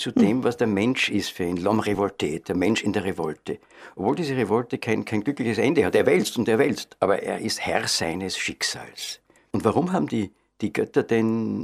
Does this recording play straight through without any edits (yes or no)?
no